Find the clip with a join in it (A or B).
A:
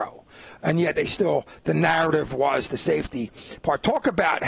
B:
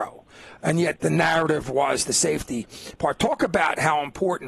B